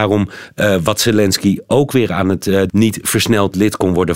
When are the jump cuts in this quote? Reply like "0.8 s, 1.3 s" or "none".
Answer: 2.7 s